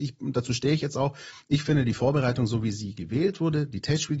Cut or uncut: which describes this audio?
uncut